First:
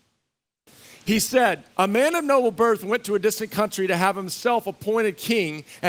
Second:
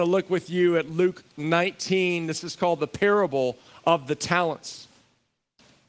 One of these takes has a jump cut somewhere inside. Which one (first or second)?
first